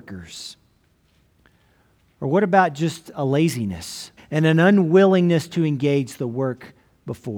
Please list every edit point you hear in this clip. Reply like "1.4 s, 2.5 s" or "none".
4.2 s